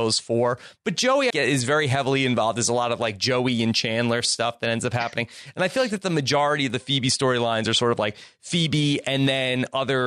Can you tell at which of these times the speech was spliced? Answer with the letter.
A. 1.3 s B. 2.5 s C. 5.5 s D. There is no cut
A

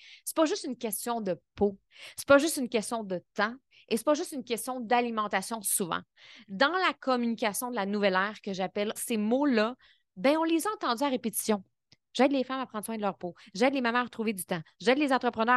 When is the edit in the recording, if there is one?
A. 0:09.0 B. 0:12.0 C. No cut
A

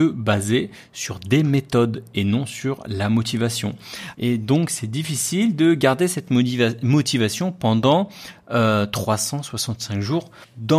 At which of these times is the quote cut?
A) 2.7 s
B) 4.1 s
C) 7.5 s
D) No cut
B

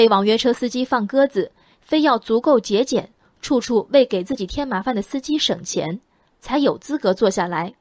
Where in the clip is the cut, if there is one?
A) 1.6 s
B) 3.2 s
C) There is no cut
C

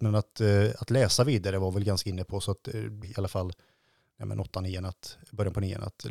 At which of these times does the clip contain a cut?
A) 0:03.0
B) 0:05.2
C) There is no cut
A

